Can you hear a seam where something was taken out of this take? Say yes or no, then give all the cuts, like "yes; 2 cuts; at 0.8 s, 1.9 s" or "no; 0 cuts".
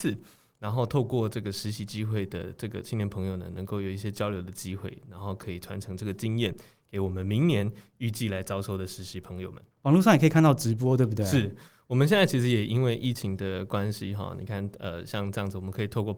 yes; 1 cut; at 9.7 s